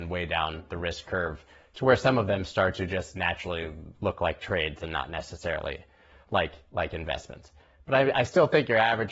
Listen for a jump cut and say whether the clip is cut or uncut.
uncut